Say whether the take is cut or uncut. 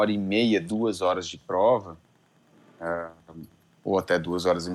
uncut